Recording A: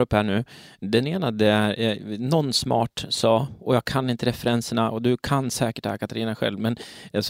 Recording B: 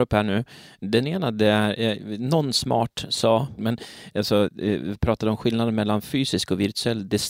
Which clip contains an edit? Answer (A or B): B